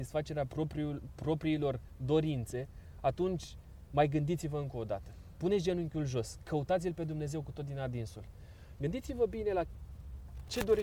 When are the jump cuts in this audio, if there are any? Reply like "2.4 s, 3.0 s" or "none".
8.8 s